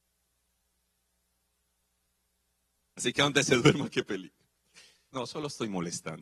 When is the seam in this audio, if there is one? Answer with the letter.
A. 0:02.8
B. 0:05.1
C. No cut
B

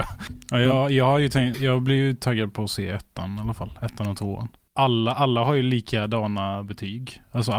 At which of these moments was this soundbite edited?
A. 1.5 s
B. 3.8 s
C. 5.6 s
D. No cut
A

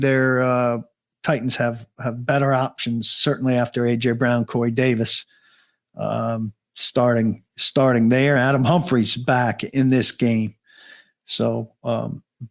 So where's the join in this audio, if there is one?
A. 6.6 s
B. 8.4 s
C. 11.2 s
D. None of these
D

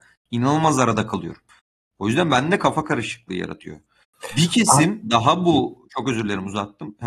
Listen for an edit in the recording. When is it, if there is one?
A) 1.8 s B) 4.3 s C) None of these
C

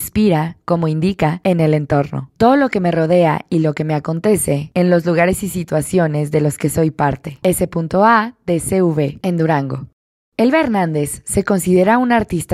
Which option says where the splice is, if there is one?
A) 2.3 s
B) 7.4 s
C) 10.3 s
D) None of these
B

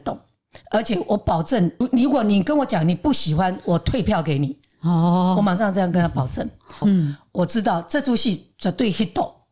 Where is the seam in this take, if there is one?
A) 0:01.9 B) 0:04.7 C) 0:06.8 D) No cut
C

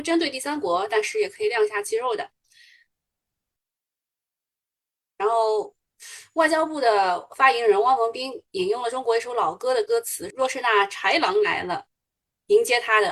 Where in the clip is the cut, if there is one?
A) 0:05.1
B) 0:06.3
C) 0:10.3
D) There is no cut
C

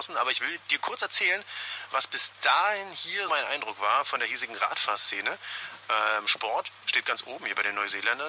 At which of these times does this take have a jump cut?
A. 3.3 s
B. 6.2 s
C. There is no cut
A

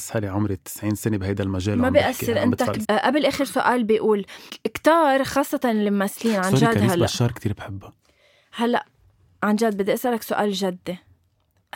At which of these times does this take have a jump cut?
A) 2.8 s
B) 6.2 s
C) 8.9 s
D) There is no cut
A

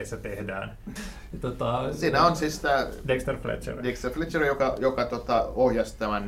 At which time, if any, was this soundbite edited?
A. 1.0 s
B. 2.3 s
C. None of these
A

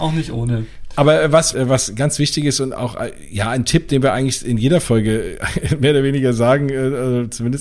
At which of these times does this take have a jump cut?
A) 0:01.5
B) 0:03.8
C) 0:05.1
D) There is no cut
A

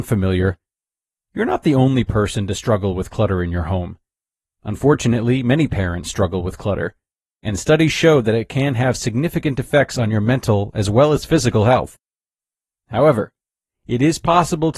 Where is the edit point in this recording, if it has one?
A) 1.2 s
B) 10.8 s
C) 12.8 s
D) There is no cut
D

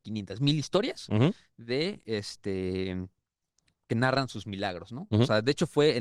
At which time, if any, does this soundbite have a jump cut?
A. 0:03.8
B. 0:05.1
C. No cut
C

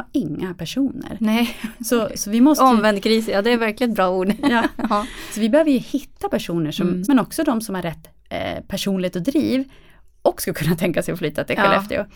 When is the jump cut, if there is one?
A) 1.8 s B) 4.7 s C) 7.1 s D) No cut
C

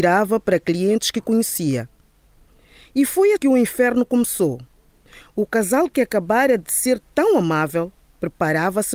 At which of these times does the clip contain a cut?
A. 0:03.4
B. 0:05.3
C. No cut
A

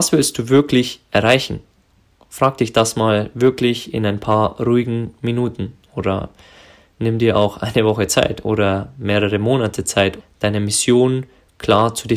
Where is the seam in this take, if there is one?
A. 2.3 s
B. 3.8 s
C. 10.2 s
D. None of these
C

